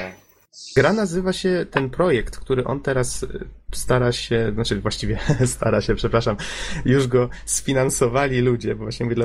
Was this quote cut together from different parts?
no; 0 cuts

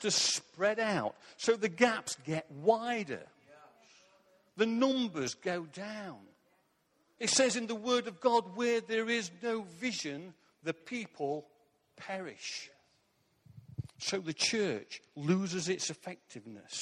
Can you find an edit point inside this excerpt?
no; 0 cuts

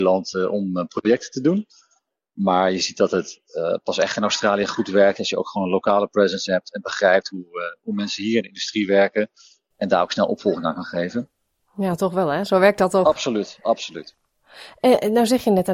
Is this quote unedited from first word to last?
yes; 0 cuts

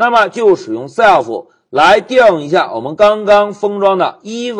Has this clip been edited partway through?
no; 0 cuts

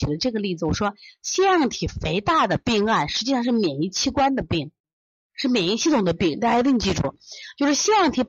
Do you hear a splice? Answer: no; 0 cuts

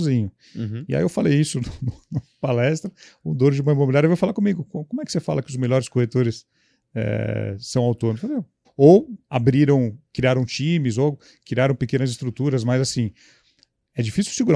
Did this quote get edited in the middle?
yes; 1 cut; at 8.6 s

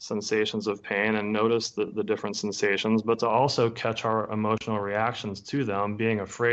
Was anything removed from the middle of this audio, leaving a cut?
no; 0 cuts

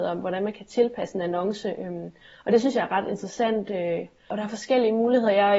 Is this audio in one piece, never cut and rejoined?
yes; 0 cuts

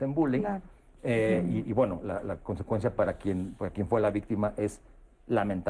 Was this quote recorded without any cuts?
yes; 0 cuts

